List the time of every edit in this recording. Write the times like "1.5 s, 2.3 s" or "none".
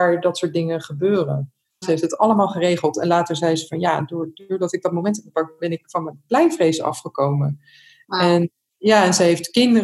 1.8 s